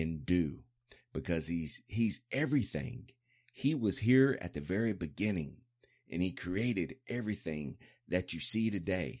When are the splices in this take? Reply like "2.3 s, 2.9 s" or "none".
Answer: none